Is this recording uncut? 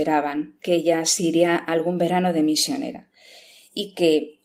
yes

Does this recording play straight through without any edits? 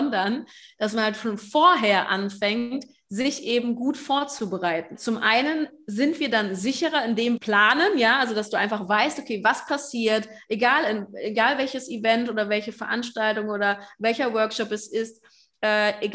no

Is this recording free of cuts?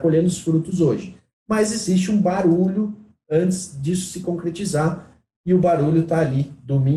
yes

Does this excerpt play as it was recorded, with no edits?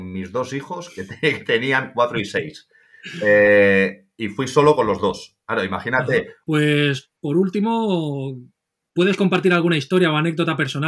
no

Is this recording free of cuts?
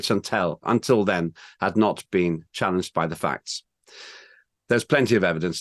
yes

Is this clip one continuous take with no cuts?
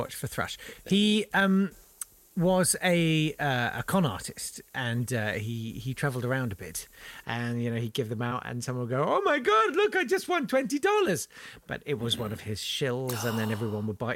no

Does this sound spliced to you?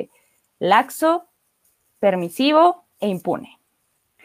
yes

